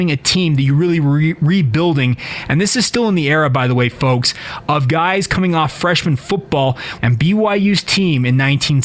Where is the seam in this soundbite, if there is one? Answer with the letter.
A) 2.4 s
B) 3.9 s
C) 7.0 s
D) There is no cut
C